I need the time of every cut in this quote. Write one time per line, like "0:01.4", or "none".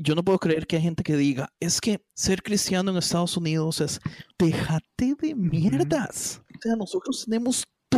none